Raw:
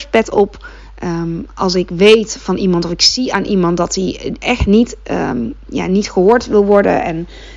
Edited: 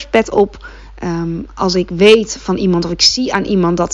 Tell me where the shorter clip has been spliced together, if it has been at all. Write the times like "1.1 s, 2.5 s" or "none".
none